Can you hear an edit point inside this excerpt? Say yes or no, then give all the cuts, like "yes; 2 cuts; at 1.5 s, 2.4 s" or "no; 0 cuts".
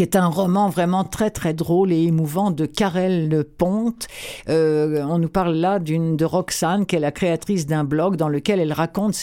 no; 0 cuts